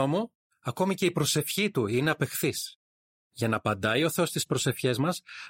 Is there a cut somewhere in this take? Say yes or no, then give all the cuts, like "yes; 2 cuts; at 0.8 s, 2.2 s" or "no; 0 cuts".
yes; 1 cut; at 3.1 s